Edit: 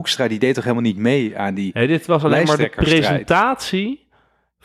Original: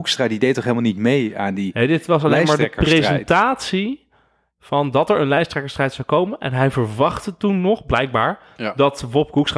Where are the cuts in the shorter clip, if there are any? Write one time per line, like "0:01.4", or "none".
none